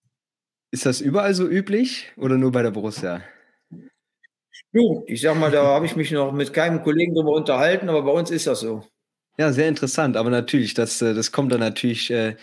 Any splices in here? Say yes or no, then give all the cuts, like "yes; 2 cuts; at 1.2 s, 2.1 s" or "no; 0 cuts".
yes; 2 cuts; at 5.1 s, 9.2 s